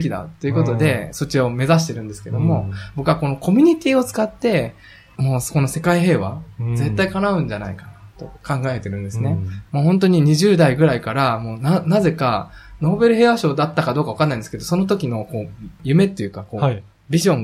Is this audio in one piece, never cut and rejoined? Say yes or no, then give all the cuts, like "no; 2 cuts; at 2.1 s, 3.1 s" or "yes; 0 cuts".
no; 1 cut; at 9.7 s